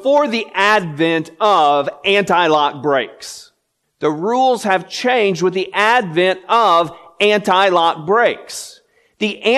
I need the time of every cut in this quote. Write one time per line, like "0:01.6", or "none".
0:03.8